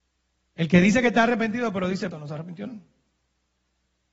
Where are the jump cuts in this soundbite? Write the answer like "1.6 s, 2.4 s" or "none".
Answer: 2.1 s